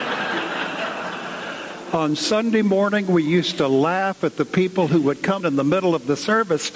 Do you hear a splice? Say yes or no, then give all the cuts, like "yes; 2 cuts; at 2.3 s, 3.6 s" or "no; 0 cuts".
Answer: yes; 1 cut; at 5.4 s